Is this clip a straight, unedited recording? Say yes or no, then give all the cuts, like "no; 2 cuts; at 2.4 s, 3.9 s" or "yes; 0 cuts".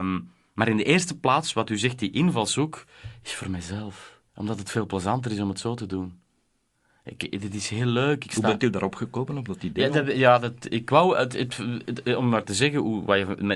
no; 1 cut; at 4.3 s